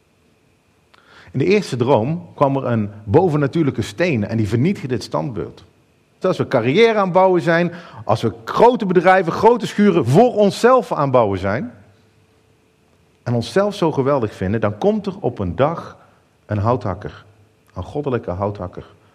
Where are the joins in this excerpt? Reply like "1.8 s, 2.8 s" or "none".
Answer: 2.3 s, 6.2 s